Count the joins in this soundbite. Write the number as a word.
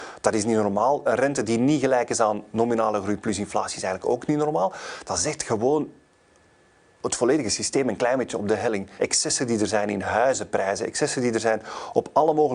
one